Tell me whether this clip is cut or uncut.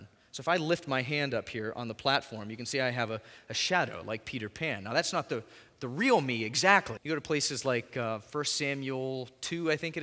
cut